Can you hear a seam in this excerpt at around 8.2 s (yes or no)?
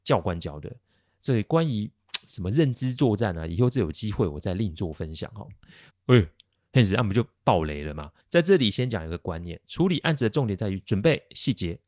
yes